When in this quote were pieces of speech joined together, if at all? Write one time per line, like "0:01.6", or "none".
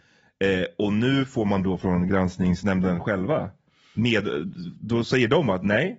none